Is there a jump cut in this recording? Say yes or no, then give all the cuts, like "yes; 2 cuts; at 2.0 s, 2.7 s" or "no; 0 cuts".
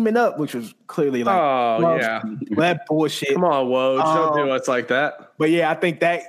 no; 0 cuts